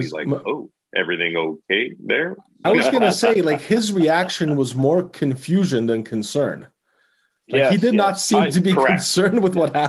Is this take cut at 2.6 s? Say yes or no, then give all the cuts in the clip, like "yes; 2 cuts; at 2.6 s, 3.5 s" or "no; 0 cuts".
yes; 1 cut; at 2.6 s